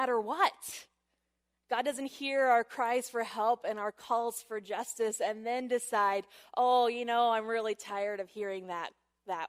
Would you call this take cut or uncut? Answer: cut